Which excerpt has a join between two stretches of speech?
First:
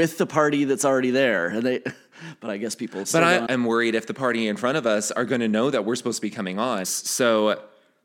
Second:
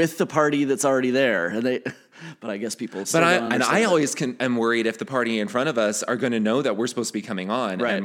first; 2 cuts; at 3.5 s, 6.8 s

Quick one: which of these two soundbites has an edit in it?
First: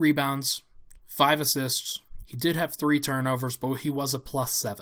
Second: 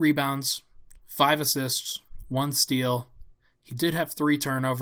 first; 1 cut; at 2.2 s

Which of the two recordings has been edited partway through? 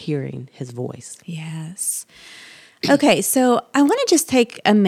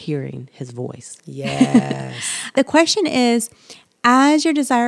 second; 1 cut; at 1.2 s

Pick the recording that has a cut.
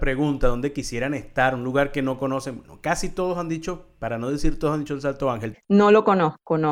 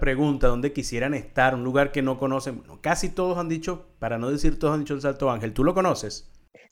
first; 1 cut; at 5.5 s

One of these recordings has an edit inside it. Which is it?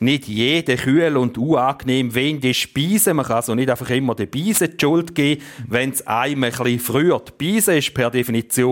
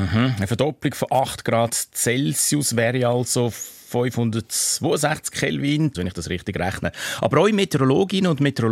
second; 1 cut; at 5.9 s

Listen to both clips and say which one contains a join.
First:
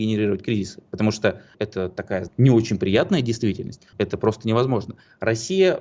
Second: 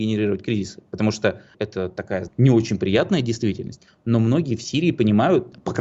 first; 1 cut; at 3.9 s

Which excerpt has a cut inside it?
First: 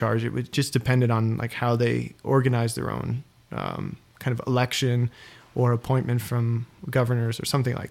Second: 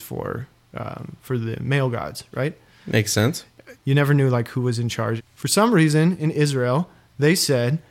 second; 2 cuts; at 3.7 s, 5.2 s

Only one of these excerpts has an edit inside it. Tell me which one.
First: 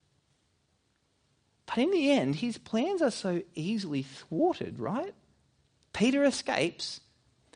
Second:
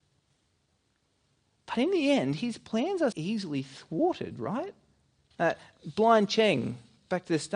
second; 2 cuts; at 3.1 s, 5.3 s

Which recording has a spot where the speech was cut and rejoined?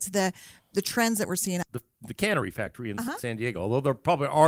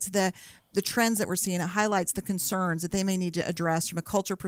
first; 1 cut; at 1.6 s

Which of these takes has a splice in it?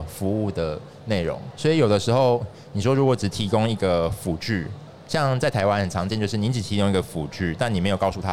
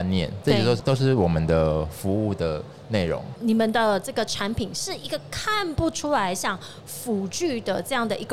second; 1 cut; at 3.4 s

